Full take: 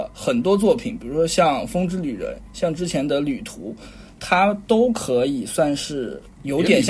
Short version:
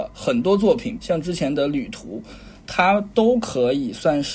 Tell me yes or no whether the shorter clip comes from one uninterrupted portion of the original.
no